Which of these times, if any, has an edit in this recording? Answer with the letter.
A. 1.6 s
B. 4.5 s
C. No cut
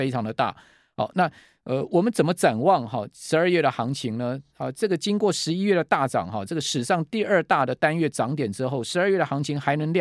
C